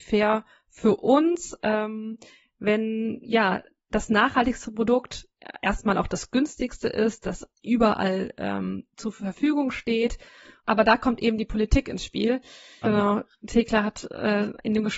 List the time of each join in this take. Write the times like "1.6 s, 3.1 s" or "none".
12.8 s